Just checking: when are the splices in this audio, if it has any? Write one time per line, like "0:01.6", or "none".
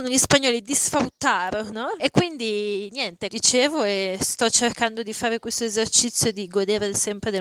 0:02.0
0:03.3

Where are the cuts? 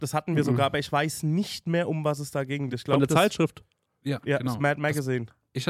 none

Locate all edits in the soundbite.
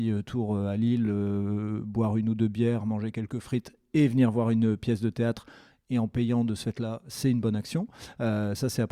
none

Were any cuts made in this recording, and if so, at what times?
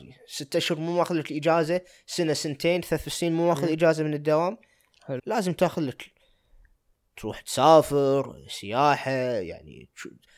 0:05.2

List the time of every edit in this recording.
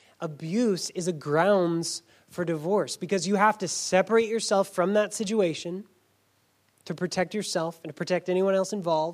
none

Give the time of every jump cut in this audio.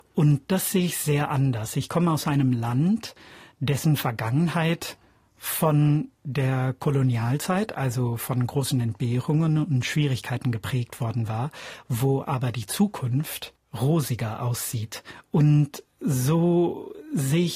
none

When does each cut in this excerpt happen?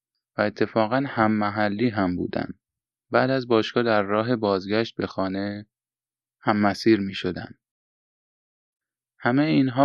none

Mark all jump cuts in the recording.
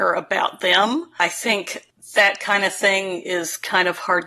none

